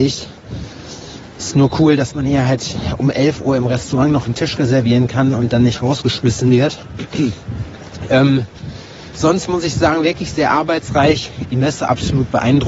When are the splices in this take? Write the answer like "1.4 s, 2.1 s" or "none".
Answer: none

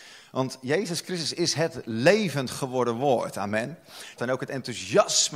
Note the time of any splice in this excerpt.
4.2 s

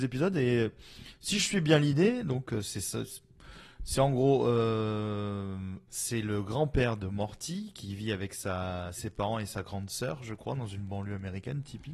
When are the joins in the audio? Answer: 5.9 s

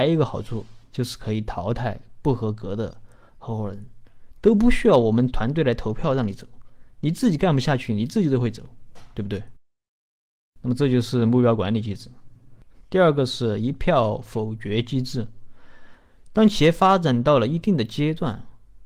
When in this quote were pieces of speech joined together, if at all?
none

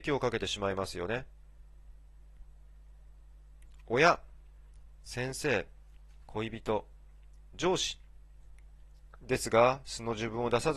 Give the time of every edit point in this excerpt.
6.2 s, 9.2 s

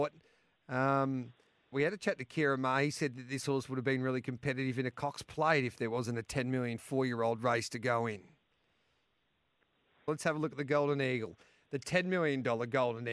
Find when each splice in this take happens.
1.7 s, 10.1 s

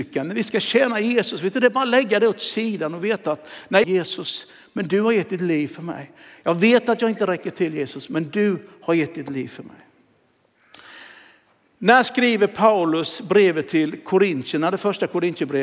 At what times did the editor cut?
3.8 s

